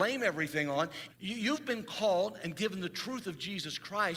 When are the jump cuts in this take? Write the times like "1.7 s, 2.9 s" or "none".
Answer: 1.1 s